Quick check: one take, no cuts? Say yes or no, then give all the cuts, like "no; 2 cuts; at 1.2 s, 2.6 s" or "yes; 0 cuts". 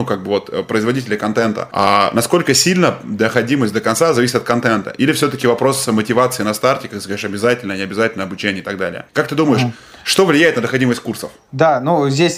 yes; 0 cuts